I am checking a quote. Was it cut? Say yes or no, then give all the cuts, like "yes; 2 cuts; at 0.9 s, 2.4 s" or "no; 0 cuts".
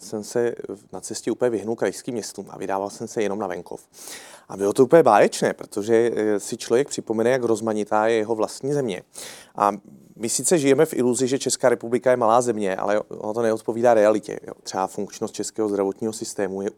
yes; 1 cut; at 14.6 s